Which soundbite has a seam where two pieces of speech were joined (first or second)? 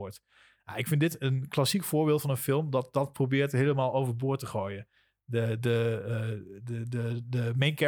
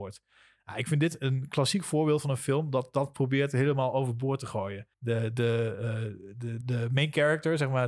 second